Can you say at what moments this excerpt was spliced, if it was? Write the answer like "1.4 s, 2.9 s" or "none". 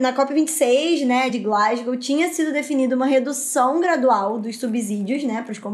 none